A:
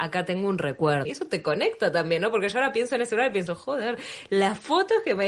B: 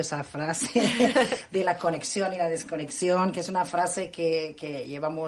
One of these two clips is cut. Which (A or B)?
A